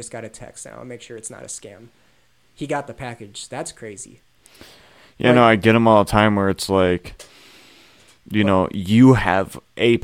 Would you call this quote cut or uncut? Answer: uncut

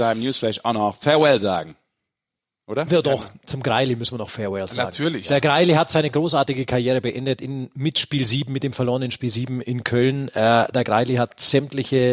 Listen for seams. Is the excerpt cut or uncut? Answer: cut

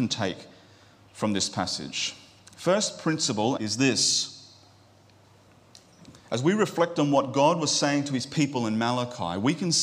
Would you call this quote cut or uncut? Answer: cut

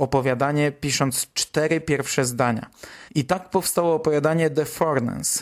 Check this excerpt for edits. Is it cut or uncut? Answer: cut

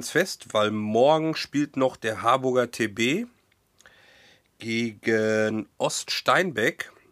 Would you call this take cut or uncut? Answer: uncut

